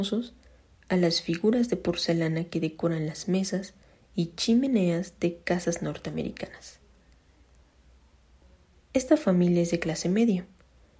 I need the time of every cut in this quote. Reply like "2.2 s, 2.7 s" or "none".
none